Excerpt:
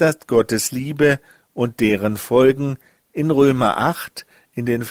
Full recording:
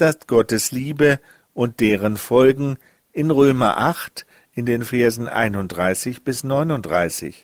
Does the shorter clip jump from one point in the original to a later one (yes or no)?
no